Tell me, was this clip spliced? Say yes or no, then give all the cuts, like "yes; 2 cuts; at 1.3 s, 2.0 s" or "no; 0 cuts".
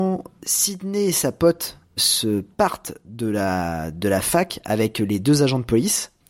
yes; 1 cut; at 2.0 s